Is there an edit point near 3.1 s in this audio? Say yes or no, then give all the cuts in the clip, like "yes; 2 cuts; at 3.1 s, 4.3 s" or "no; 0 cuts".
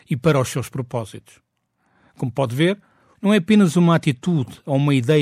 yes; 1 cut; at 3.1 s